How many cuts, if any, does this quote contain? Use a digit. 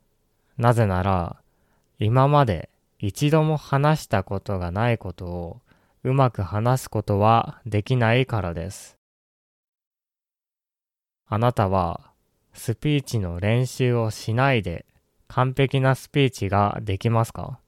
0